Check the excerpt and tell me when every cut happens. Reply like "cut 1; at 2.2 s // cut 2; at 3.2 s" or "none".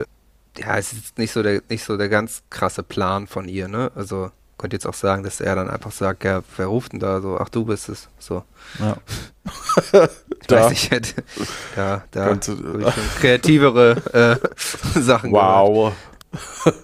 cut 1; at 8.1 s